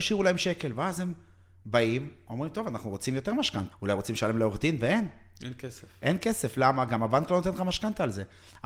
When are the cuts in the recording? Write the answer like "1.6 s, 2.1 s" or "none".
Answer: 3.7 s